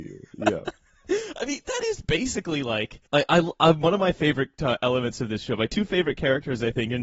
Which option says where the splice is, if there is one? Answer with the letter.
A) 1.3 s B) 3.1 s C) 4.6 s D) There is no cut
B